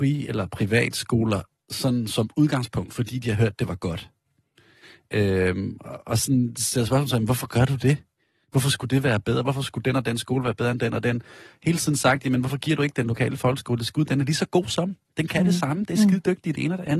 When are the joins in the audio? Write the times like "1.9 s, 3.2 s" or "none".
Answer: none